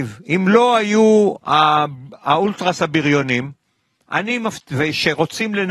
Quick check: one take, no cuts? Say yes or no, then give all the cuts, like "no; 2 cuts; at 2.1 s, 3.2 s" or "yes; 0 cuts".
yes; 0 cuts